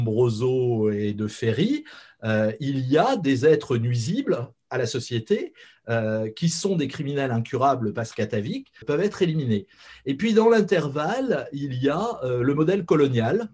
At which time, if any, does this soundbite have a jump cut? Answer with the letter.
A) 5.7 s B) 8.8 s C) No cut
B